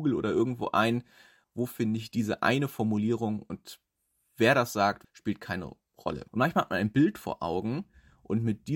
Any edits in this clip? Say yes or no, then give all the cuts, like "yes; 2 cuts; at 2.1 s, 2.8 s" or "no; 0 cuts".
yes; 3 cuts; at 1.4 s, 5.0 s, 6.3 s